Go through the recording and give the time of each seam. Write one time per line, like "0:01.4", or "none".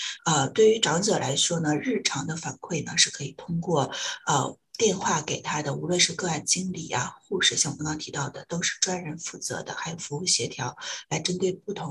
0:07.8